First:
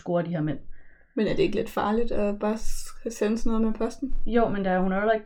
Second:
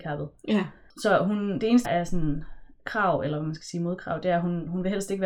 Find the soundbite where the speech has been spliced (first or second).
second